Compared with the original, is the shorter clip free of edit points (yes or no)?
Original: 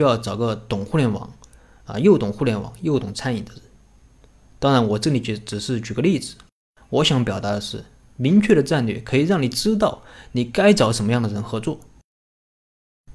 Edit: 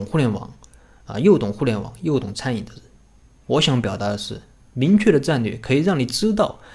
no